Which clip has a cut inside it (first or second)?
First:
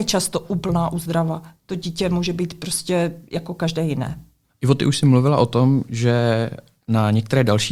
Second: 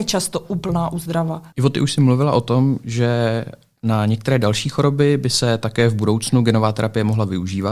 second